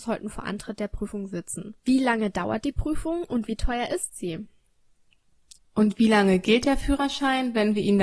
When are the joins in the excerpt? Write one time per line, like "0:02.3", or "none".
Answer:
0:01.8
0:05.6